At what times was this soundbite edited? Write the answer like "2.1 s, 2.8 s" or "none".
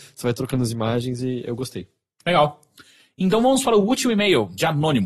none